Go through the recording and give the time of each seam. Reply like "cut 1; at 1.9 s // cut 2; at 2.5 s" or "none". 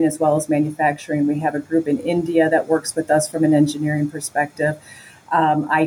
none